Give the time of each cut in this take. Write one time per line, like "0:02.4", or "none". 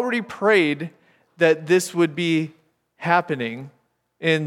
none